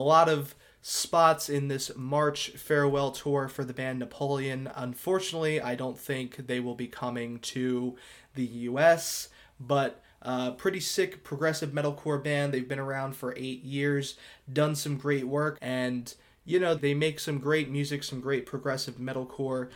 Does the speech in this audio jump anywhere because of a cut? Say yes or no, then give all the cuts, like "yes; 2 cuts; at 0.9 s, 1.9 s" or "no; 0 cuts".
yes; 2 cuts; at 15.5 s, 16.8 s